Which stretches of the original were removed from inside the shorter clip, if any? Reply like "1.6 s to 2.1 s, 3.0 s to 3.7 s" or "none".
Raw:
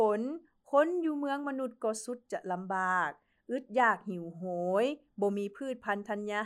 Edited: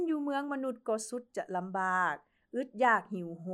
none